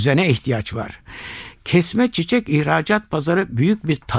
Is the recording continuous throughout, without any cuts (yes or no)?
yes